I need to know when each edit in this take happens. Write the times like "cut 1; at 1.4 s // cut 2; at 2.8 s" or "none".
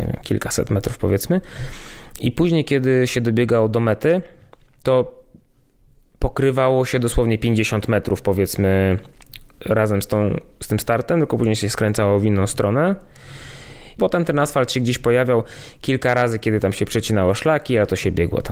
cut 1; at 14.0 s